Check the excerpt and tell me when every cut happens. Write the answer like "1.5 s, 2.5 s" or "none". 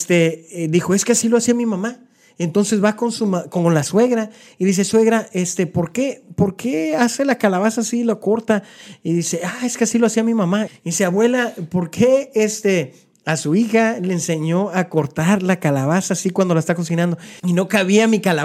10.7 s, 17.4 s